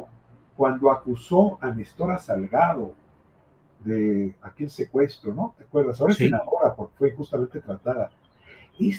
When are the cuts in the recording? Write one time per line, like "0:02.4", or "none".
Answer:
none

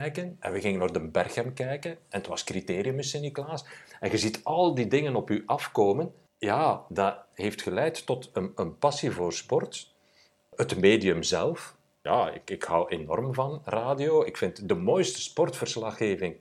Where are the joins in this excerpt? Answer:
none

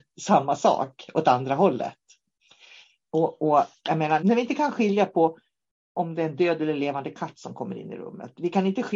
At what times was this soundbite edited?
0:04.2

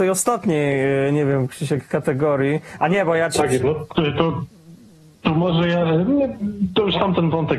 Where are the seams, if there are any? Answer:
none

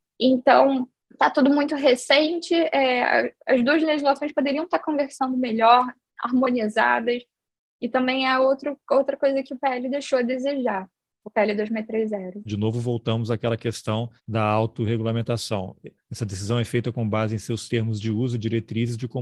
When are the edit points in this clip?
0:12.5
0:14.2
0:16.0

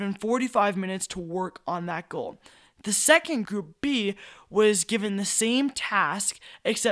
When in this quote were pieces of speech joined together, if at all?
0:03.5

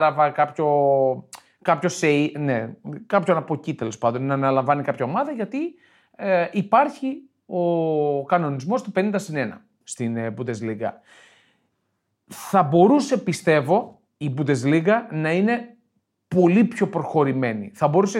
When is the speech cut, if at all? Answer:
0:09.8
0:14.1

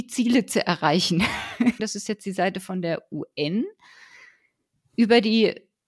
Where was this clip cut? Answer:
0:01.8

